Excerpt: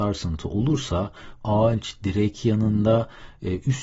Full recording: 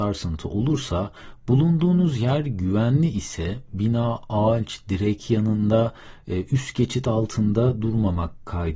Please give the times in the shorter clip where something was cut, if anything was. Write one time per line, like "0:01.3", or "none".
0:01.4